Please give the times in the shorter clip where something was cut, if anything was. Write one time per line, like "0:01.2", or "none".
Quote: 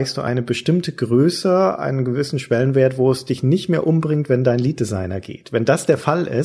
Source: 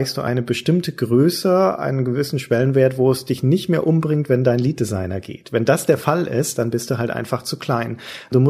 none